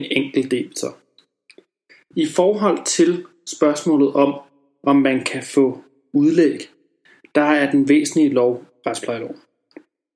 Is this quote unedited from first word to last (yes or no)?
no